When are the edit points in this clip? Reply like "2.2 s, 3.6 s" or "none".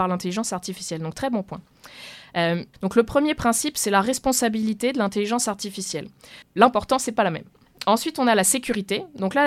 2.7 s, 6.4 s